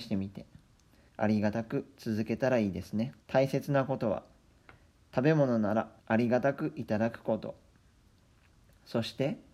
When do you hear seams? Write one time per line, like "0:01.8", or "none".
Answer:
0:01.1
0:03.2
0:06.0